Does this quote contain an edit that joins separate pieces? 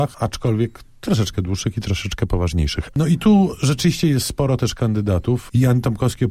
yes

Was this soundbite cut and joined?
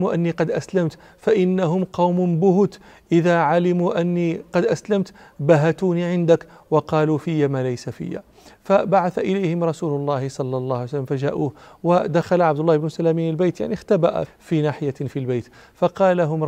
yes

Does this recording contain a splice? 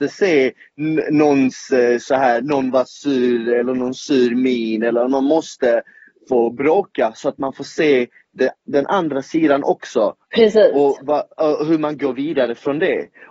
yes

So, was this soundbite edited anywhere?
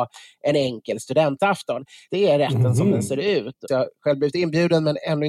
yes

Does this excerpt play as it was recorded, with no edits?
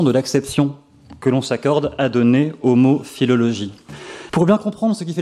no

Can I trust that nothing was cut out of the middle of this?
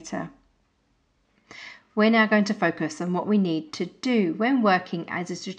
yes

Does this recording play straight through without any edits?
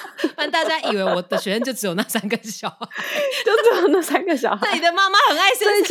yes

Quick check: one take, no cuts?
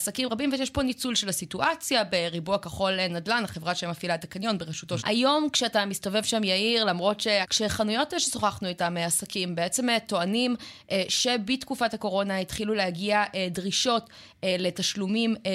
no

